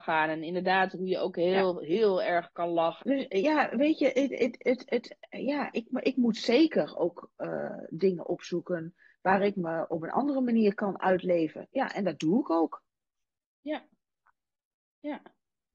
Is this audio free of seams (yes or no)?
no